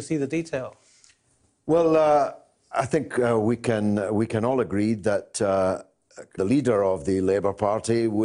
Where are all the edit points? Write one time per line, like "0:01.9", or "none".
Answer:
0:06.4